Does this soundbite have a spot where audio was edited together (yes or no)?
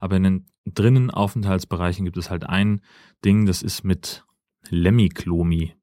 no